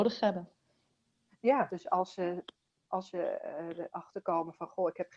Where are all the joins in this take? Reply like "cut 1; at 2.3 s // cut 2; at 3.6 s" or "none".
cut 1; at 1.7 s